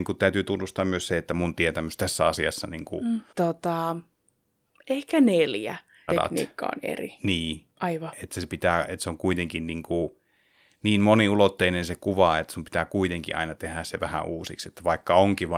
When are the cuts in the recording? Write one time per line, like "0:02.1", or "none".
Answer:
0:03.3
0:06.1